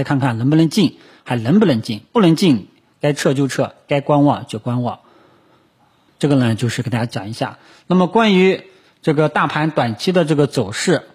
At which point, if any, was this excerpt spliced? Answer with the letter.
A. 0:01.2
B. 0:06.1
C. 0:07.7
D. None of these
B